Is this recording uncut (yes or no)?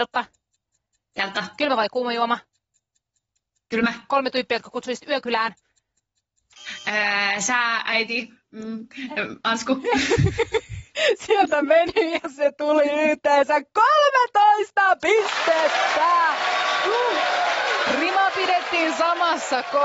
yes